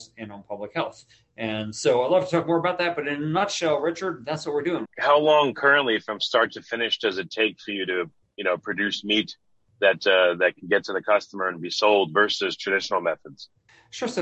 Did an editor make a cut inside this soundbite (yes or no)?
yes